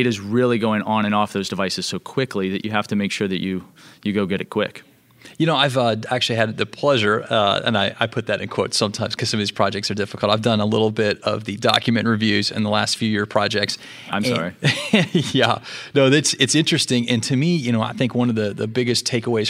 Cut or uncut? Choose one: uncut